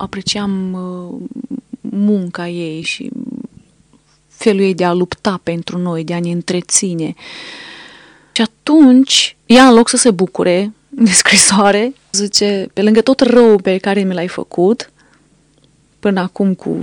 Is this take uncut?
no; 3 cuts; at 2.8 s, 9.4 s, 12.1 s

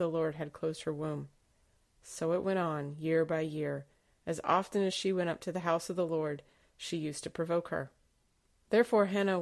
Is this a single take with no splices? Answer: yes; 0 cuts

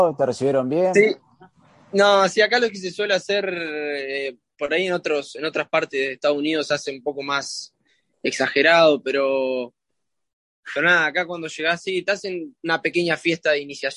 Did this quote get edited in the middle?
no; 0 cuts

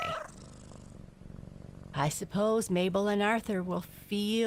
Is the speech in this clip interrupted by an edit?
no; 0 cuts

